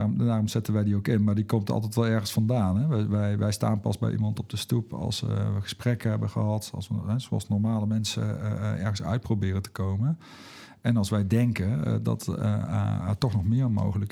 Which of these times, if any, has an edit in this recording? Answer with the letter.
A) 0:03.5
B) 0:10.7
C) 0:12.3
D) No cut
D